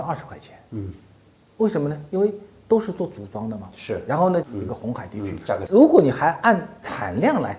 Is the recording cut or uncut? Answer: cut